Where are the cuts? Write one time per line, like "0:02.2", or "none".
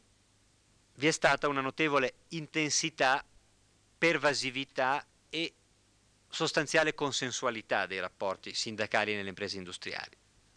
none